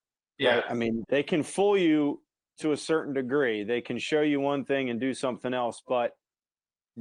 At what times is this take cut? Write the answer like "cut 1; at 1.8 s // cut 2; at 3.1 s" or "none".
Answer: cut 1; at 1.0 s